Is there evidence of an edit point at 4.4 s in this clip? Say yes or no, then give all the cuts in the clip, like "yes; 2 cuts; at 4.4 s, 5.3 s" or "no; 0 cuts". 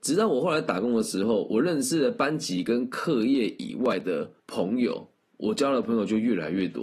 yes; 1 cut; at 4.4 s